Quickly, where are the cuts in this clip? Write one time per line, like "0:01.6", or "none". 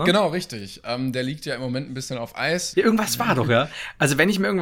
0:02.7